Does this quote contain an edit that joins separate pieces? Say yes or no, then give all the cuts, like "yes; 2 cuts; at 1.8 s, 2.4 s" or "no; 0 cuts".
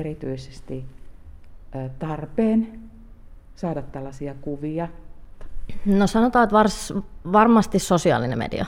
no; 0 cuts